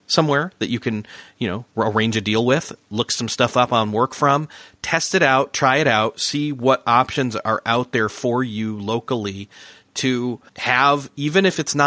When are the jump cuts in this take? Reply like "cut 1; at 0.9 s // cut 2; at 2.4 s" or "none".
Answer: cut 1; at 10.5 s